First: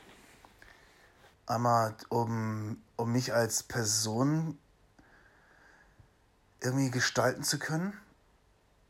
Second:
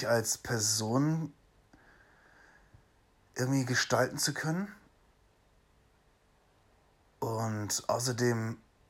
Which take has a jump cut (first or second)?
first